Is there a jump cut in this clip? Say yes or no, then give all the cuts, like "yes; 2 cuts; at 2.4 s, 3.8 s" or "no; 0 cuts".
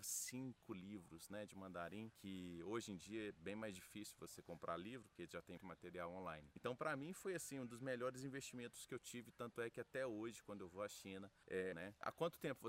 yes; 2 cuts; at 5.6 s, 11.7 s